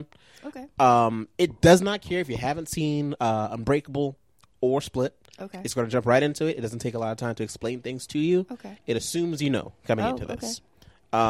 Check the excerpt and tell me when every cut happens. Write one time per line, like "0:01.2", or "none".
none